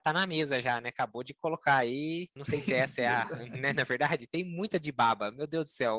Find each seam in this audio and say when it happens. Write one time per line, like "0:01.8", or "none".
0:02.4